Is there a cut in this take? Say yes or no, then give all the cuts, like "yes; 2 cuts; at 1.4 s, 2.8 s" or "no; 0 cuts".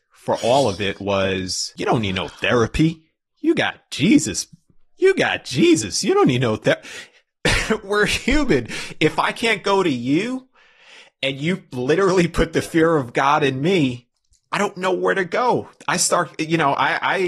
yes; 1 cut; at 7.5 s